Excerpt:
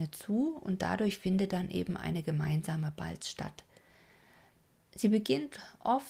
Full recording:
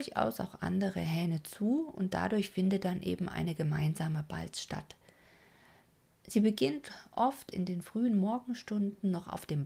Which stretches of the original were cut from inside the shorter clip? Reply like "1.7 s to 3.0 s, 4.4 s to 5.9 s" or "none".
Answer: none